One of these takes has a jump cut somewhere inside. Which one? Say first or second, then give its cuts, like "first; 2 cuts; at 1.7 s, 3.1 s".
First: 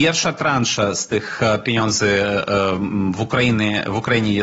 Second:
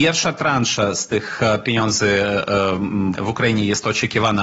second; 1 cut; at 3.1 s